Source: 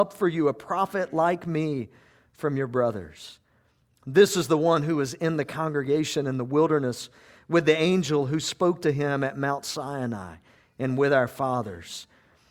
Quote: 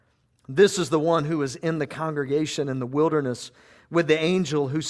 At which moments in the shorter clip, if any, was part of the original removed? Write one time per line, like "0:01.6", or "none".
none

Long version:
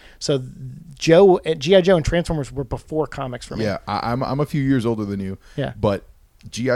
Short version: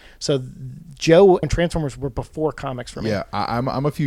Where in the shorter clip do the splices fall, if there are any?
0:01.4

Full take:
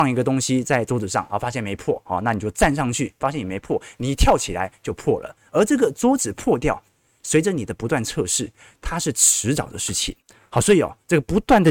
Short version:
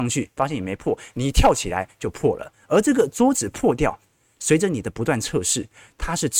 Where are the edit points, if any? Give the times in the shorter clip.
none

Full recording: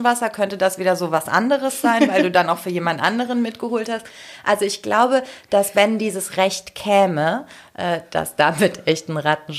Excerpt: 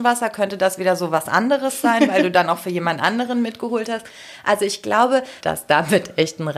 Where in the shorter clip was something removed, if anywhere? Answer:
0:05.4

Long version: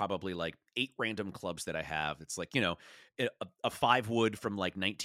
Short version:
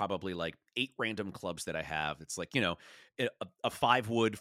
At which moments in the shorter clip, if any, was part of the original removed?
none

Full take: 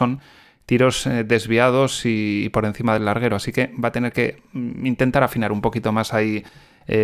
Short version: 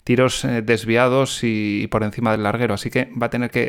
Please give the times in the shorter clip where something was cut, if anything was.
none

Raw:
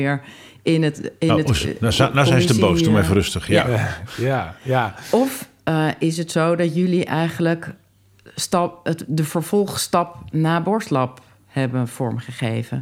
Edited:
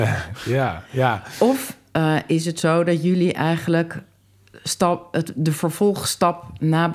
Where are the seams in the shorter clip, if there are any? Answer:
none

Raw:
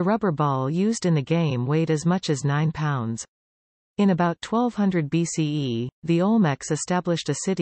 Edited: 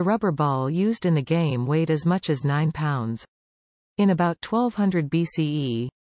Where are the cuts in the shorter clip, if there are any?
none

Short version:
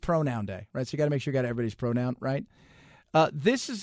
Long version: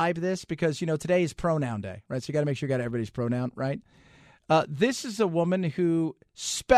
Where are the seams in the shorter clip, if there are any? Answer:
none

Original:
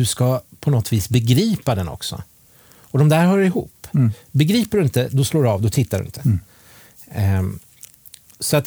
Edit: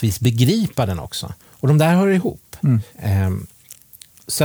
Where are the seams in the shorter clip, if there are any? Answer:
0:01.4
0:02.9

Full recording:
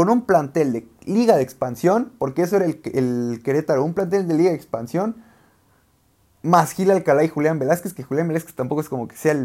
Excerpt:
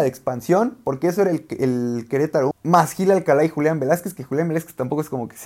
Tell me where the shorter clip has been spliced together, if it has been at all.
0:02.5

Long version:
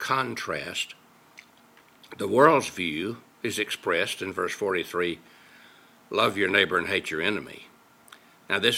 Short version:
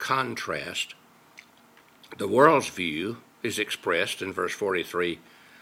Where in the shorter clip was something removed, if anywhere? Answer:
none

